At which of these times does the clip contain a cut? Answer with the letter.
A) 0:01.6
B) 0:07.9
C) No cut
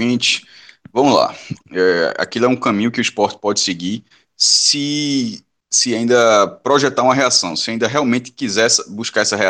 A